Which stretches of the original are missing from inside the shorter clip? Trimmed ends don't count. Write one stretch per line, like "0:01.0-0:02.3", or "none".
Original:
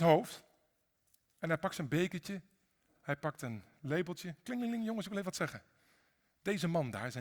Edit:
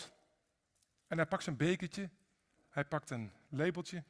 none